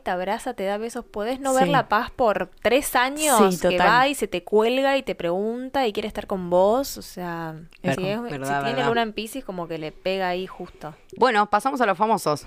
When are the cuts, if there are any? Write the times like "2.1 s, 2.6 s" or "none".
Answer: 7.9 s, 11.2 s